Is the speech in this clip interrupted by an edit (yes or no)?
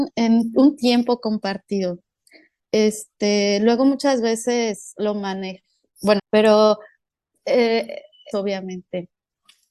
yes